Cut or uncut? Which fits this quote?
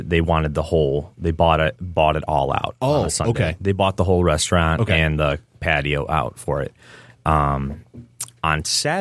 uncut